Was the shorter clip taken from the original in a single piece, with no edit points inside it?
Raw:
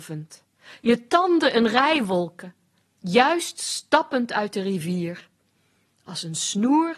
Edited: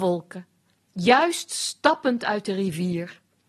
yes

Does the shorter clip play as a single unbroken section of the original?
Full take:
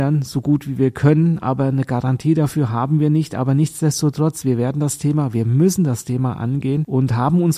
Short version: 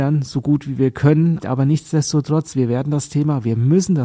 no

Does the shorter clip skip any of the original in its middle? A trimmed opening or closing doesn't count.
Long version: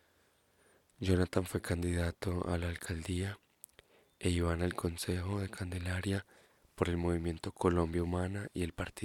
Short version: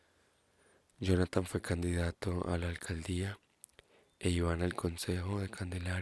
no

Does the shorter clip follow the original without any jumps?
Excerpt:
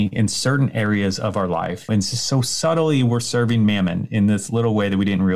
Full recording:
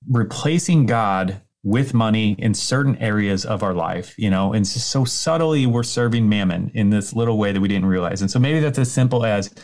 no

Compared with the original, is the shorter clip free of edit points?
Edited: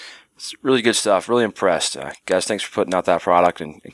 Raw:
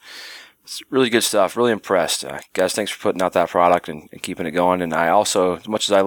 yes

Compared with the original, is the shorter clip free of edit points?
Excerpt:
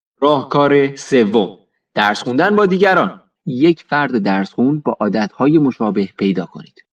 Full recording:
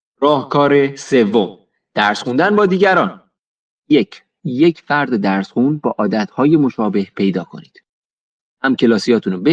no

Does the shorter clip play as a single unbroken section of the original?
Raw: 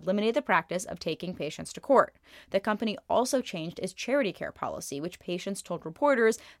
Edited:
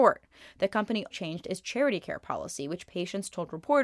no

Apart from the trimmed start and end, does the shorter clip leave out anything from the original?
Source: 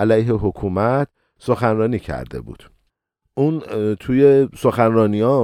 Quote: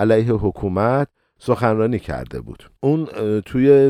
yes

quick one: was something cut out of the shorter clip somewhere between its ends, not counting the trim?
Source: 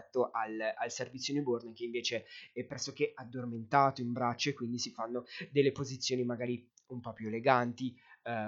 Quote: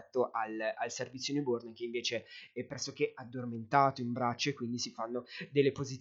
no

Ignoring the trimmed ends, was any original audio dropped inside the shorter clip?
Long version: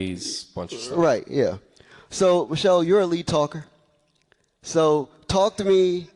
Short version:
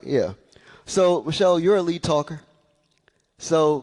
no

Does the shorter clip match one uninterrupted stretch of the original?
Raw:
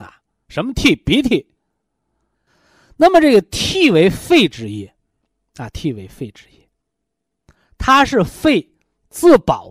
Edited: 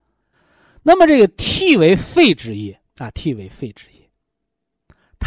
no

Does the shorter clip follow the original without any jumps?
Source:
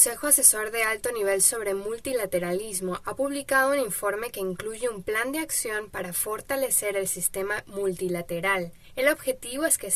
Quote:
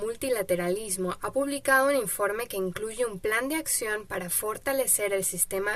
yes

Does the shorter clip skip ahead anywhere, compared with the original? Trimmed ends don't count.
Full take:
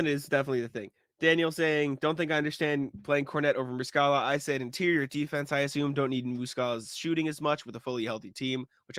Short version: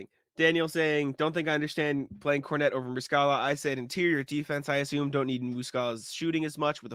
no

